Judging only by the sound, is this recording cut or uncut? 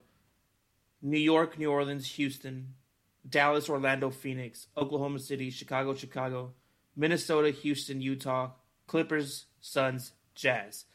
uncut